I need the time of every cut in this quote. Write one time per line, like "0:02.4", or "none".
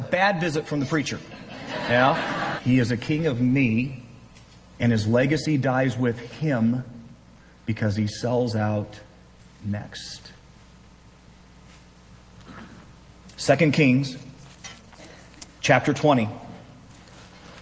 0:02.6
0:04.7